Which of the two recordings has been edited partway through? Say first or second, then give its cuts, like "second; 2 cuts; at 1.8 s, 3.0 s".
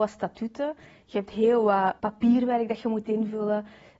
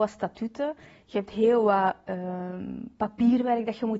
first; 1 cut; at 2.0 s